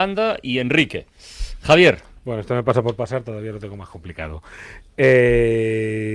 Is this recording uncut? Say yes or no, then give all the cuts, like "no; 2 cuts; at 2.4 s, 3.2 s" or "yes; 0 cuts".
yes; 0 cuts